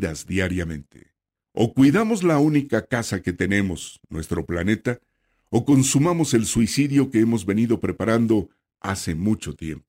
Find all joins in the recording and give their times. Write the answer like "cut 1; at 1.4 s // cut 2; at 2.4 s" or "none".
cut 1; at 1.4 s